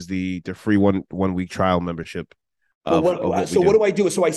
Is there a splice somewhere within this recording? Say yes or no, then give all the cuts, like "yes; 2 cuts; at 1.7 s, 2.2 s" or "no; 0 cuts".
no; 0 cuts